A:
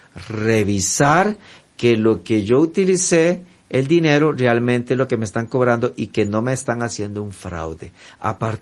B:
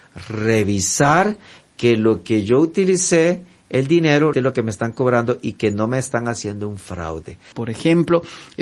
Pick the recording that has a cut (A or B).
B